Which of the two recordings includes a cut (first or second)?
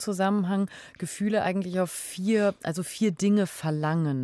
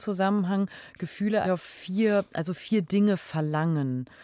second